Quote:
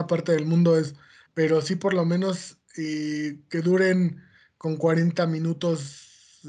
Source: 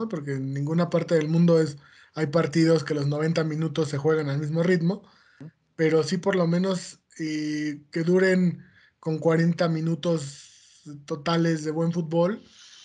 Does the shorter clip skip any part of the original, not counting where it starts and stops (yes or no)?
yes